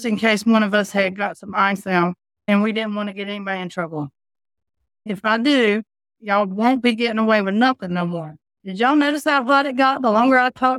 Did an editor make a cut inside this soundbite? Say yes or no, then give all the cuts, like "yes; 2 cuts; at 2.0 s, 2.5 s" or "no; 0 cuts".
yes; 2 cuts; at 5.1 s, 8.5 s